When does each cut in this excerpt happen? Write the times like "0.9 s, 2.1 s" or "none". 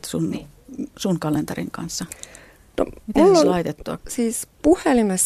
4.0 s